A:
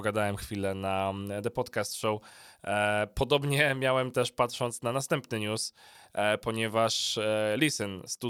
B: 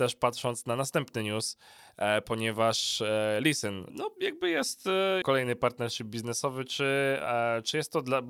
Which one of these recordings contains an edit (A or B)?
B